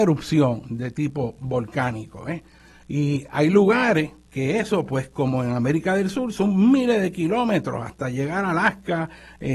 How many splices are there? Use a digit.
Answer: 1